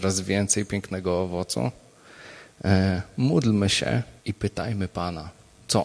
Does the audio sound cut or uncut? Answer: cut